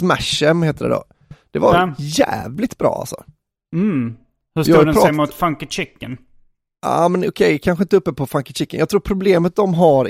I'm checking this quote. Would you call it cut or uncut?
uncut